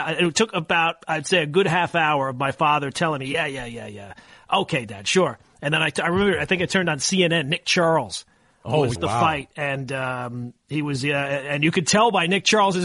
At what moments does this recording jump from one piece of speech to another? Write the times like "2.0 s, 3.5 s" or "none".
9.0 s